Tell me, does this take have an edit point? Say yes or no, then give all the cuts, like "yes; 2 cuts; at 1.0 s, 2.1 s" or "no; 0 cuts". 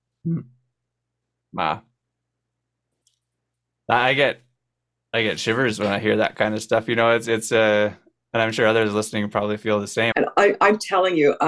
yes; 1 cut; at 10.1 s